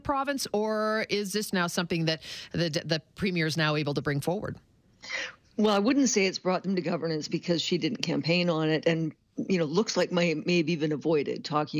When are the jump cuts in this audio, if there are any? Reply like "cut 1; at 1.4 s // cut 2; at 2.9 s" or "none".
cut 1; at 1.5 s